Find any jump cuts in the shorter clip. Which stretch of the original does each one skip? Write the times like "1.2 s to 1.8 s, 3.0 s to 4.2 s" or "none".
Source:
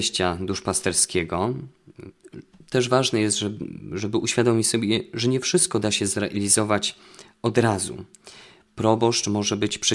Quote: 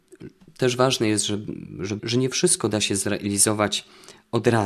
4.1 s to 5.1 s